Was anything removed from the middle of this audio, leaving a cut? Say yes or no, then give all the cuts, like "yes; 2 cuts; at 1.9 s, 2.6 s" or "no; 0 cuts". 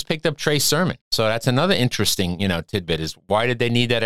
yes; 1 cut; at 1.0 s